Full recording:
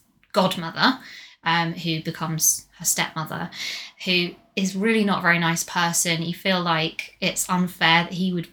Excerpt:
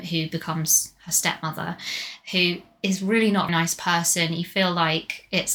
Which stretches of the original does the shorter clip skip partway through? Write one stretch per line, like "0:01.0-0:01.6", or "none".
0:05.2-0:05.4